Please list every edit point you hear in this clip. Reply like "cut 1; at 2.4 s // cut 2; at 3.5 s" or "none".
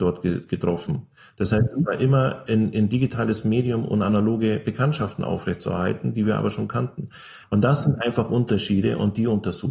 cut 1; at 7.4 s